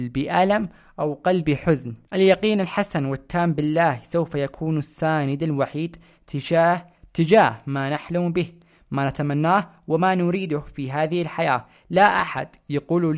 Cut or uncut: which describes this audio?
uncut